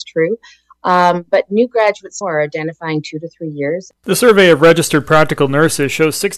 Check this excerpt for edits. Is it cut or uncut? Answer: cut